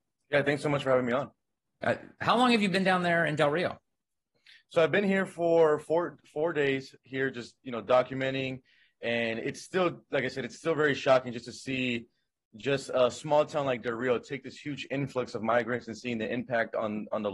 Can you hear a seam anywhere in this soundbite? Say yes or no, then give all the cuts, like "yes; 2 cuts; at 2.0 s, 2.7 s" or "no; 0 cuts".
no; 0 cuts